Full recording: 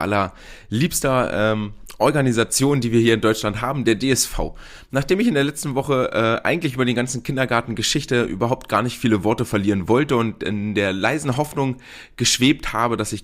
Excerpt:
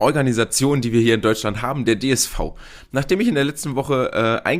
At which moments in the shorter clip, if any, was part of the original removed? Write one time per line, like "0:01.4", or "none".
none